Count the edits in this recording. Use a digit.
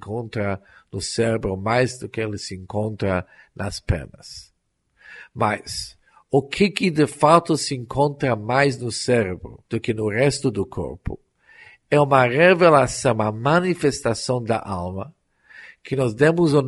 1